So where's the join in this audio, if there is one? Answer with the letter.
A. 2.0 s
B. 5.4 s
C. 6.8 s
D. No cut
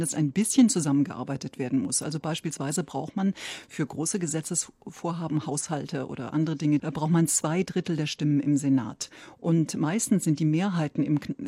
C